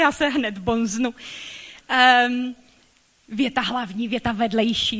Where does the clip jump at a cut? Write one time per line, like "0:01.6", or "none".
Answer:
none